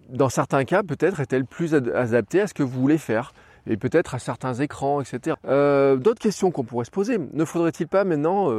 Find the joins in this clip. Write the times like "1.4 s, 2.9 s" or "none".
5.3 s